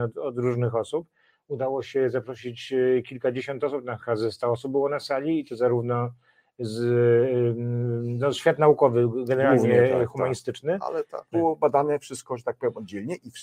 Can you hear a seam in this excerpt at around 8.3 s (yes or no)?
no